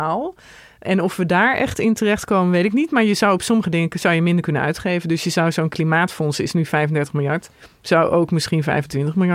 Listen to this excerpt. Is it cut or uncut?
uncut